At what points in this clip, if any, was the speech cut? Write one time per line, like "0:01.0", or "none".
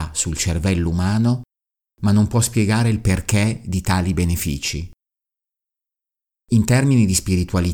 none